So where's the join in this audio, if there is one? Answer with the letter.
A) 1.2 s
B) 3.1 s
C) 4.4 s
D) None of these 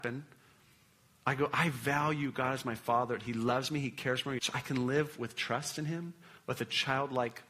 C